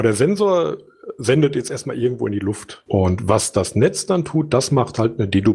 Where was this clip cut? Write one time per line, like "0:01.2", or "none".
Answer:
0:02.9